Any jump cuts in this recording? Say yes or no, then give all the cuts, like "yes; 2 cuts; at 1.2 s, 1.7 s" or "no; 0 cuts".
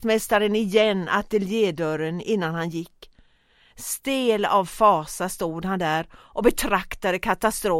yes; 1 cut; at 3.7 s